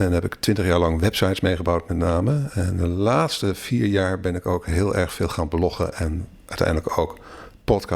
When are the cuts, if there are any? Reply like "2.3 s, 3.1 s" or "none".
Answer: none